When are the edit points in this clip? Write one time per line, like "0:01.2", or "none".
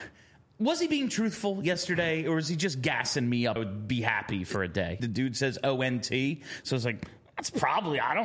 0:03.6
0:05.0